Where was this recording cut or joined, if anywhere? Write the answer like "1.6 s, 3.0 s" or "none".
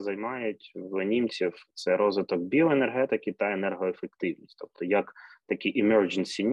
none